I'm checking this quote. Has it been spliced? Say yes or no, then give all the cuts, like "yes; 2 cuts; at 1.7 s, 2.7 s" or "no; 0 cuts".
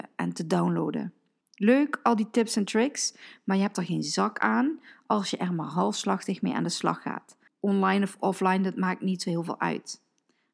yes; 2 cuts; at 1.4 s, 7.5 s